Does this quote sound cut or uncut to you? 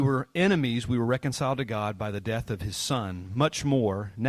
uncut